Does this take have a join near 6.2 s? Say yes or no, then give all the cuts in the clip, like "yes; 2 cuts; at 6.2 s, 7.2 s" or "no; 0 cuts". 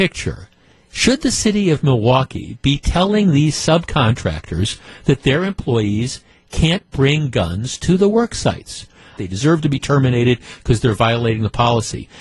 no; 1 cut; at 9.2 s